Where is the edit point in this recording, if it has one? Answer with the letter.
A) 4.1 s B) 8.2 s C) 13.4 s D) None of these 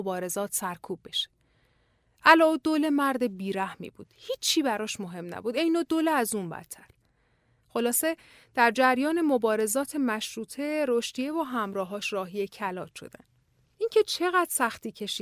D